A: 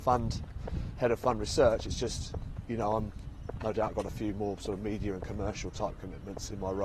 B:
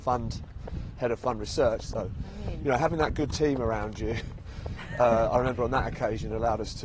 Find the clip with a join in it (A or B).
B